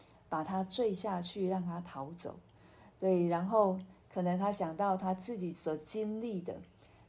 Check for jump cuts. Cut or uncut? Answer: uncut